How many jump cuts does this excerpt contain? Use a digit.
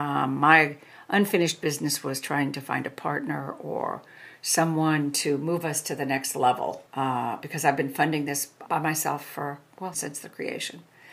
3